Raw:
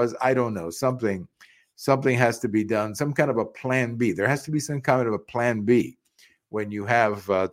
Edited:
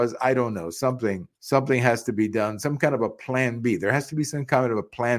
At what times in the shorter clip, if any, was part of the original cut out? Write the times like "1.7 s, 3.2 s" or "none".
1.3 s